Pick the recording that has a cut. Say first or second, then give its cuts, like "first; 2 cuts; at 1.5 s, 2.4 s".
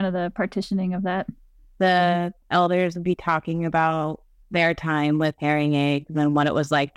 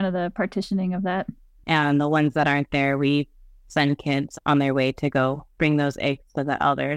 second; 1 cut; at 1.6 s